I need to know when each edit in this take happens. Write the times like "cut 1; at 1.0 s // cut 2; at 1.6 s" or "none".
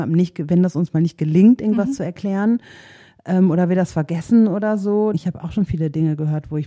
cut 1; at 5.1 s